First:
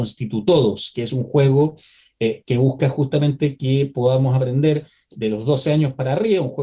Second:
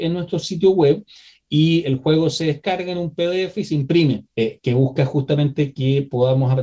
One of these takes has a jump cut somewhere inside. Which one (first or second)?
second